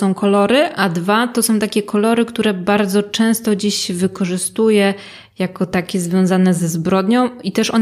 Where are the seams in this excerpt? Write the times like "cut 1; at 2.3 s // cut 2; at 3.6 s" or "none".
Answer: none